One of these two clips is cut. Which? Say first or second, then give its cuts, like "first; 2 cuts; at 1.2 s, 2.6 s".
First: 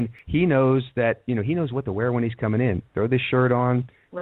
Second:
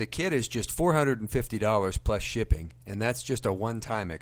second; 1 cut; at 2.8 s